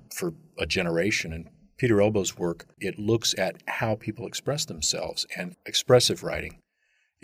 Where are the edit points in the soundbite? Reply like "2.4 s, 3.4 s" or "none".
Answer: 2.8 s